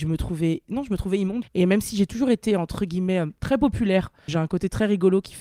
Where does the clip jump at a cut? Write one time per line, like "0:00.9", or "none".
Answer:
0:01.4
0:04.3